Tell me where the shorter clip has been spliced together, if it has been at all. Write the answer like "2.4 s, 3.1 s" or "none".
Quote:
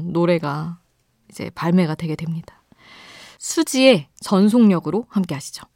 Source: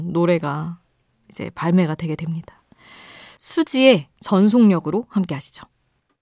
none